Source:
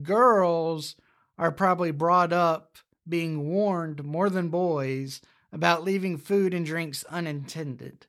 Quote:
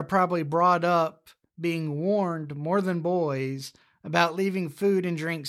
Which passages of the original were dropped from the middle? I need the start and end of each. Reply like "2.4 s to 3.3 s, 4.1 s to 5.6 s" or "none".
none

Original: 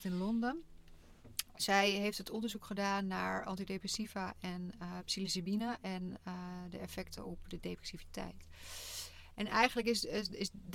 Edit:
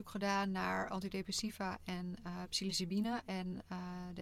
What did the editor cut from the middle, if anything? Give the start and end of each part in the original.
none

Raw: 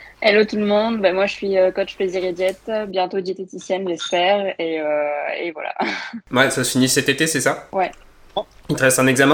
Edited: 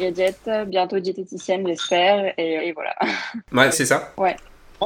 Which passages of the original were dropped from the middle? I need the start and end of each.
4.8 s to 5.4 s, 6.5 s to 7.3 s

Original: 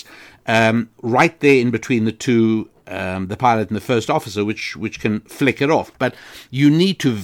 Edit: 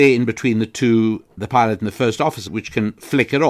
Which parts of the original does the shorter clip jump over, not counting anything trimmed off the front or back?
2.8 s to 3.3 s, 4.4 s to 4.8 s

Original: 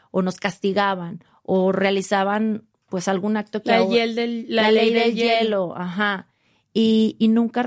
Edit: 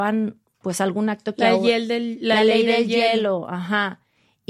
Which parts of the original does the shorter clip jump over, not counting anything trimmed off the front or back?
none

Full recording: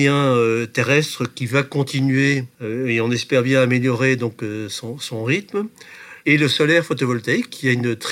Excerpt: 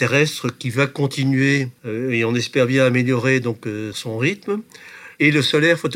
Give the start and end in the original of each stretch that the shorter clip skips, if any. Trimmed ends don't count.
4.7 s to 5.0 s

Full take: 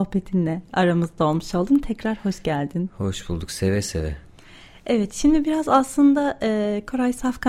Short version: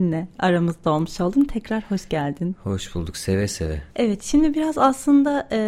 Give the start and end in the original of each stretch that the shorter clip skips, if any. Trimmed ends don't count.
4.2 s to 4.8 s

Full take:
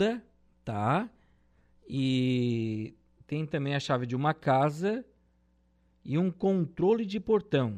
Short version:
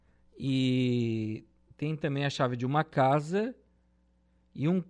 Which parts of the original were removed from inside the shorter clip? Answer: none

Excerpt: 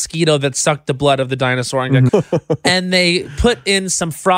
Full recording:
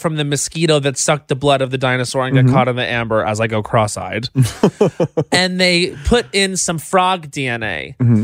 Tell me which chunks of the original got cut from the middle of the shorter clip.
2.5 s to 4.8 s

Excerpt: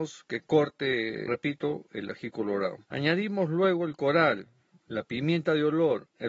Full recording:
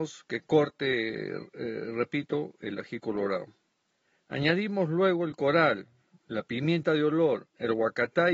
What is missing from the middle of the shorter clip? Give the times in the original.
1.3 s to 1.9 s, 3.5 s to 4.2 s

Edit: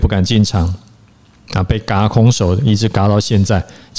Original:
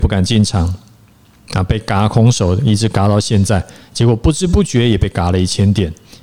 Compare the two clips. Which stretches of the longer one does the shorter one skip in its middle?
none

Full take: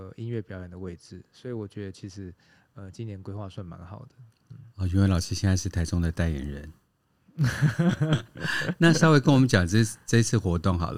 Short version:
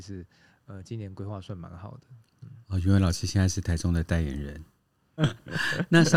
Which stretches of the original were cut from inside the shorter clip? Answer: 7.3 s to 8.1 s

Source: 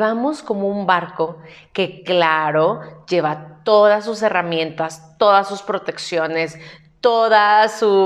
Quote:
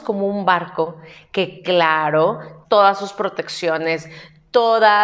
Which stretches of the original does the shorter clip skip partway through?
3.1 s to 5.1 s

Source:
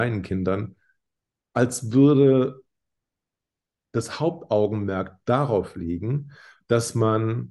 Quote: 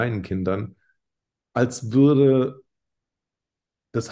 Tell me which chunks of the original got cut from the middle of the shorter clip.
none

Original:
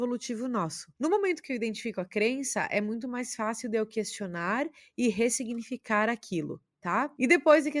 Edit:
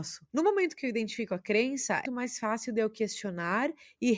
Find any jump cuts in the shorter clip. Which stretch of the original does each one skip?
2.7 s to 3.0 s

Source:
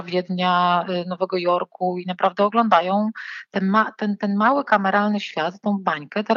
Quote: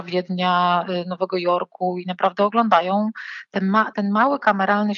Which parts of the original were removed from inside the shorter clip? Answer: 3.9 s to 4.2 s

